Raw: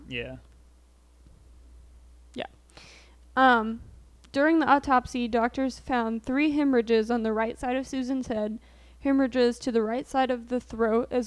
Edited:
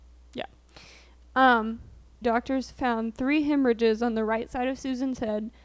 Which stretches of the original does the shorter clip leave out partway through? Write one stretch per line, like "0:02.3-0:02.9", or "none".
0:04.2-0:05.3